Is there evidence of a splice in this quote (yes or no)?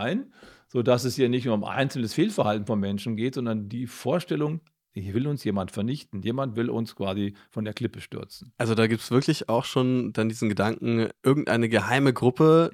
no